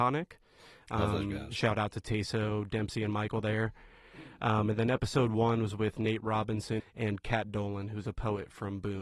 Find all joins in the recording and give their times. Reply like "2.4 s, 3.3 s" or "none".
6.8 s